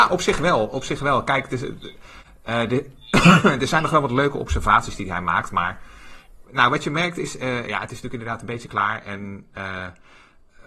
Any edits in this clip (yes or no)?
no